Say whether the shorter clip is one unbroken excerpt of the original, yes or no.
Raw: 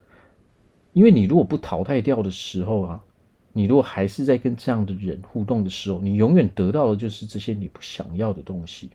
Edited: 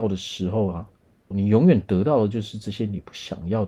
no